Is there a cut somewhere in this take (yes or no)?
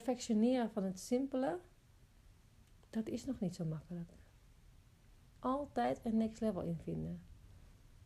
yes